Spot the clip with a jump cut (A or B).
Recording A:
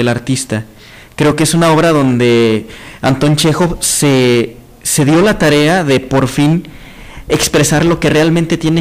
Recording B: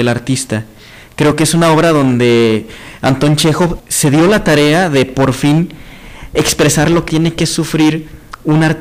B